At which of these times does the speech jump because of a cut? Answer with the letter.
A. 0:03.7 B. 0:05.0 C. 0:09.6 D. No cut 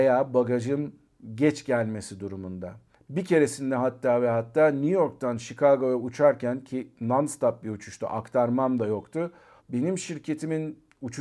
C